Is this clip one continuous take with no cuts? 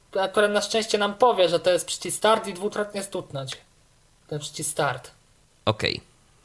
yes; 0 cuts

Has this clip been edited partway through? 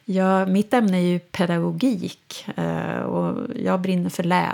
no; 0 cuts

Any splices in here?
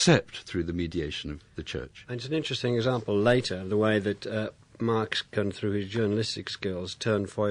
no; 0 cuts

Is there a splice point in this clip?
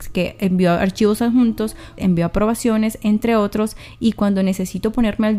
yes; 1 cut; at 2.0 s

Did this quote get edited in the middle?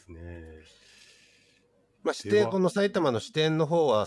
no; 0 cuts

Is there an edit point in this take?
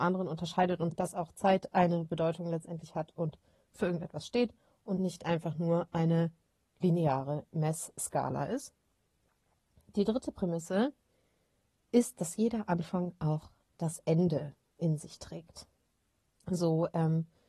yes; 1 cut; at 16.4 s

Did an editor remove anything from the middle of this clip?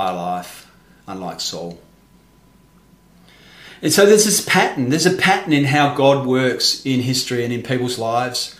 no; 0 cuts

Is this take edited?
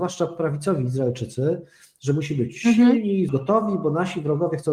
yes; 1 cut; at 3.3 s

